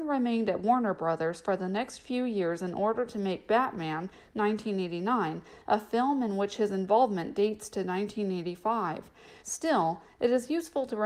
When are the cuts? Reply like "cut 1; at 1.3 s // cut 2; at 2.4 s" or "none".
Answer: cut 1; at 9.4 s